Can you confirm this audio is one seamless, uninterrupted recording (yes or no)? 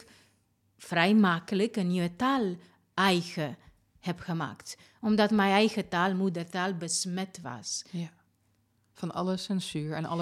yes